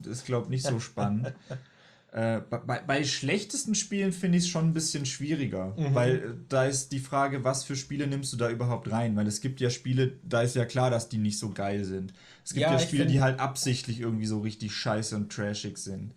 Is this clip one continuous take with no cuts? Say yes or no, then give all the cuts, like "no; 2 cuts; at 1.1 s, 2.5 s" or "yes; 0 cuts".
yes; 0 cuts